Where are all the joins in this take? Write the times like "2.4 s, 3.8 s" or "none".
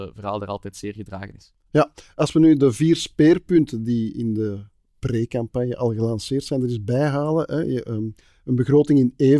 none